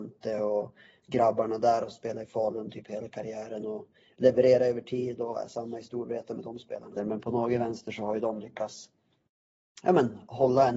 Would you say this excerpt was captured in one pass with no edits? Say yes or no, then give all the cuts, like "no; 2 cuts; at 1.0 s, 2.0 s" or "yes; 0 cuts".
no; 1 cut; at 7.0 s